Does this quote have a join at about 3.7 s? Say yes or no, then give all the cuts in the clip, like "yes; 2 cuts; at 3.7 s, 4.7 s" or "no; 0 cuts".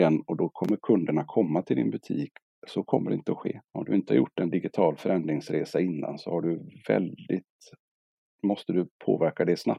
yes; 1 cut; at 3.7 s